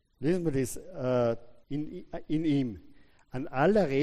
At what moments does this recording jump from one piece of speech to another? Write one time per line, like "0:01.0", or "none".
0:01.6